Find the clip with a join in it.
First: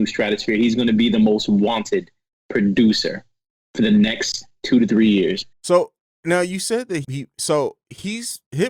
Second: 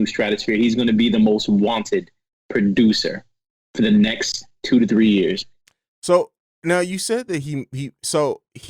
first; 2 cuts; at 5.5 s, 7.0 s

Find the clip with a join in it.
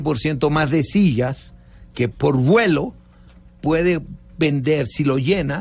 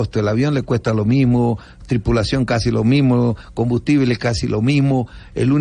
first; 1 cut; at 2.1 s

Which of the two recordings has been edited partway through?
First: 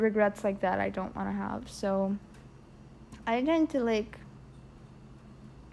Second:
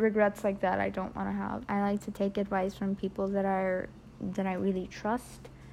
second; 1 cut; at 1.6 s

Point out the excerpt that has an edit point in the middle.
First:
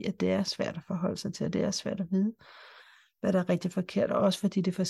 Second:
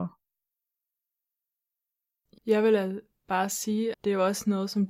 second; 2 cuts; at 2.4 s, 3.9 s

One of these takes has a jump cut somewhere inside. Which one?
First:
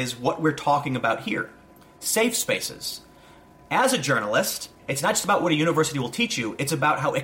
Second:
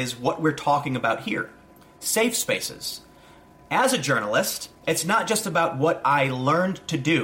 first; 1 cut; at 4.8 s

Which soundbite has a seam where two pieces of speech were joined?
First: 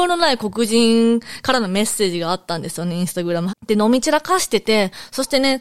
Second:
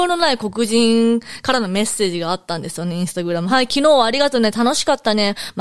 first; 1 cut; at 3.5 s

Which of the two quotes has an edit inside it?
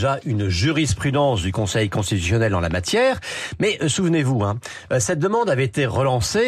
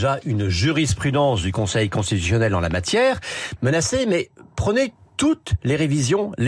second; 1 cut; at 3.6 s

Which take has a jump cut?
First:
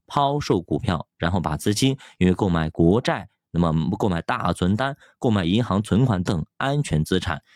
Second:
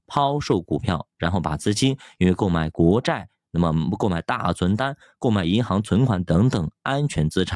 first; 1 cut; at 6.3 s

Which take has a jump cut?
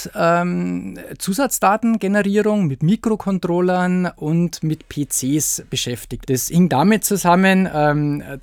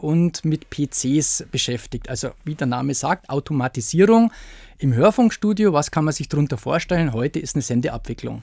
first; 1 cut; at 6.2 s

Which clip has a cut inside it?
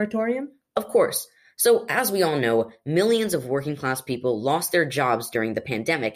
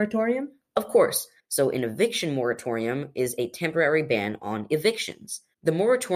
second; 1 cut; at 1.4 s

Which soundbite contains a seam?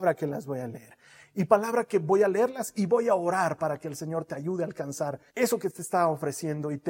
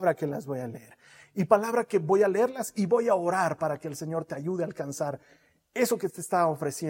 first; 1 cut; at 5.3 s

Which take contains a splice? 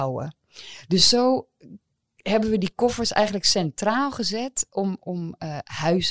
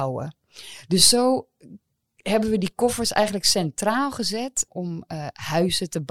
second; 1 cut; at 4.7 s

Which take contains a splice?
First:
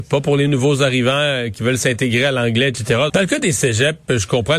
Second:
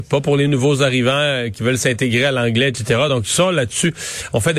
first; 1 cut; at 3.1 s

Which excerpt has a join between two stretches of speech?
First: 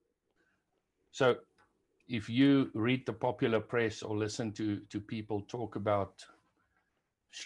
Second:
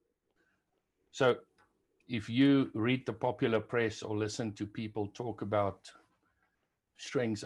second; 1 cut; at 4.5 s

